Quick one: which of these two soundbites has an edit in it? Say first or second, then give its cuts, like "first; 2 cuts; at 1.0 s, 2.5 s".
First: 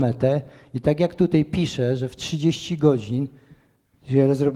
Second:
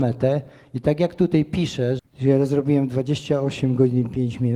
second; 1 cut; at 2.0 s